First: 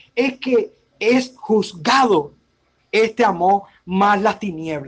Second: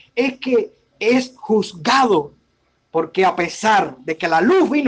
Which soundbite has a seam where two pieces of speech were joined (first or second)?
first